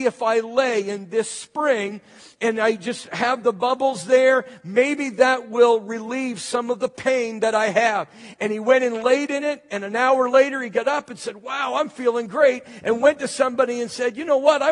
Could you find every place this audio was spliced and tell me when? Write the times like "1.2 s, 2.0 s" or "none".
none